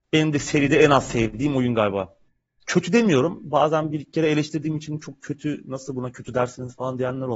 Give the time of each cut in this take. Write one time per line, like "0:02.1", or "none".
none